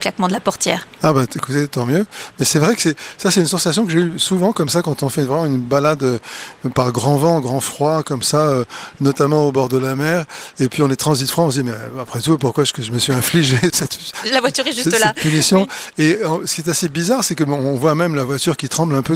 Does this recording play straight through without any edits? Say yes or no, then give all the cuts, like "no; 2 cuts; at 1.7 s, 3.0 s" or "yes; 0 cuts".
no; 1 cut; at 13.7 s